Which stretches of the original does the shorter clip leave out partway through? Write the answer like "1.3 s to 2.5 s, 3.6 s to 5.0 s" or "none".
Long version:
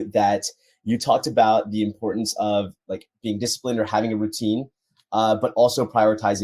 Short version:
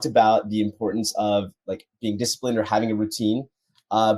none